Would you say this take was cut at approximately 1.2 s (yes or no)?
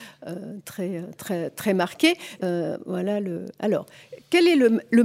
no